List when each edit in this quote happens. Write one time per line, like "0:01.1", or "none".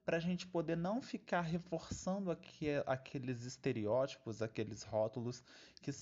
none